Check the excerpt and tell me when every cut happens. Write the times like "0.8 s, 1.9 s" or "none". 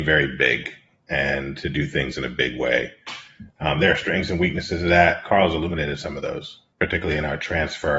6.7 s